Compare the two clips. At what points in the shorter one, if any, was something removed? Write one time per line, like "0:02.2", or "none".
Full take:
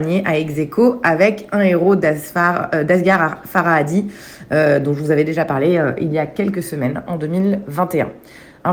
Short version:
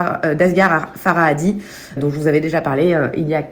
0:02.0